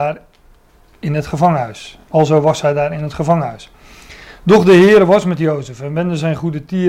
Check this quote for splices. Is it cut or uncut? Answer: uncut